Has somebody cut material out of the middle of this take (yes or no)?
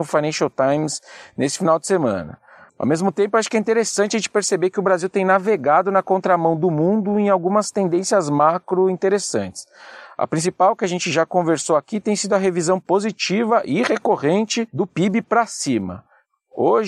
yes